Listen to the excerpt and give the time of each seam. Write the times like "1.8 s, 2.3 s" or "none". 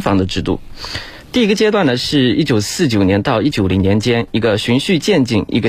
1.2 s, 3.5 s

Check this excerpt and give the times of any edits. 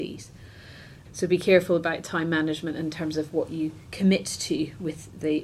1.0 s

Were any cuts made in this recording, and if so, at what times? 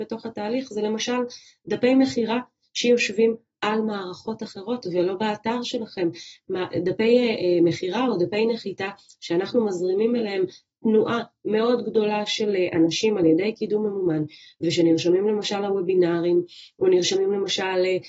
none

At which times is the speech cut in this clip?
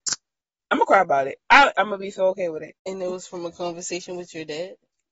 1.7 s, 2.8 s

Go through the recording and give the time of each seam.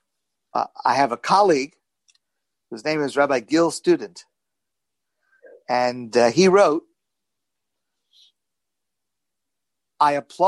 none

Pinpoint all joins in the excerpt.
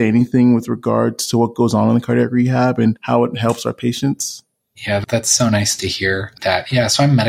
none

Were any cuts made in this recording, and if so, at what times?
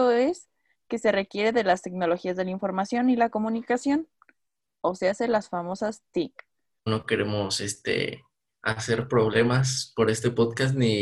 6.9 s

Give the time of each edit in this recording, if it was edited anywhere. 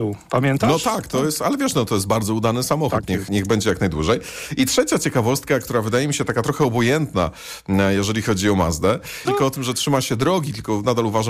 3.3 s, 9.2 s

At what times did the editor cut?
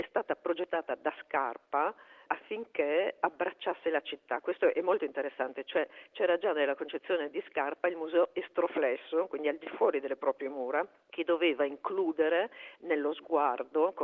none

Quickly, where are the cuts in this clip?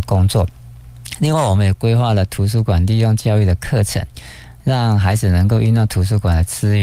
none

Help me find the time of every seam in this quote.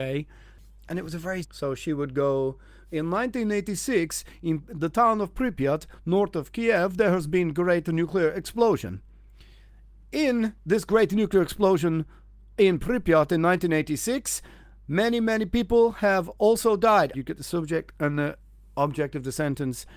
1.4 s, 17.1 s

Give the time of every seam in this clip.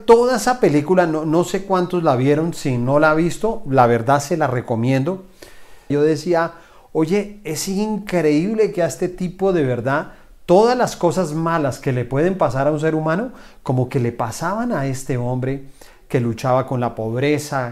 5.9 s

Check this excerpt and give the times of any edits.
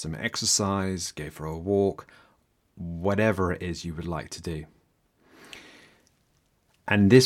none

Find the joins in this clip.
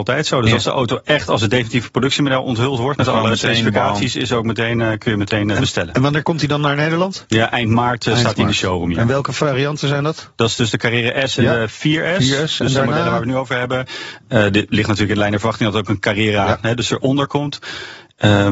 none

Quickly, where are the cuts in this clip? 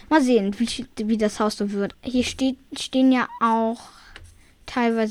1.9 s

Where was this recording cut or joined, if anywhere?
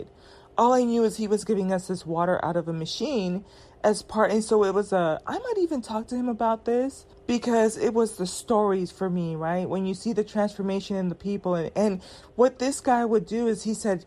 7.1 s

